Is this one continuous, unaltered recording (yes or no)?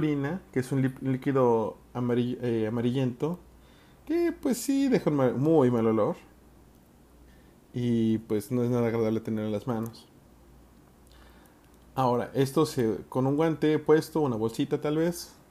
yes